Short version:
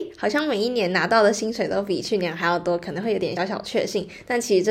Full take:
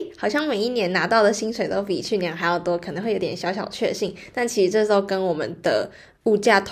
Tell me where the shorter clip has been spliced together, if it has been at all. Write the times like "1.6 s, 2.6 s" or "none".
3.4 s